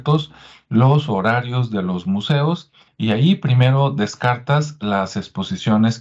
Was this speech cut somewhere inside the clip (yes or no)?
yes